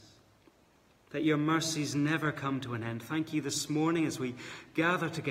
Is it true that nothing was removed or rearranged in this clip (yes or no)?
yes